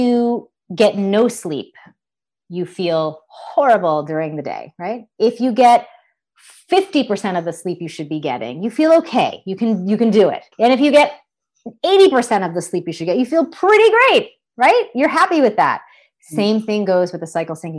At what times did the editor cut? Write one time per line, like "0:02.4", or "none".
0:10.5